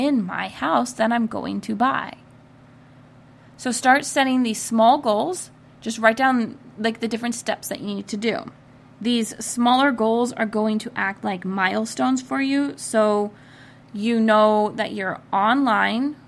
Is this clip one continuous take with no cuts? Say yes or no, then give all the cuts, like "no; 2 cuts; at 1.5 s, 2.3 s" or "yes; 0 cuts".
yes; 0 cuts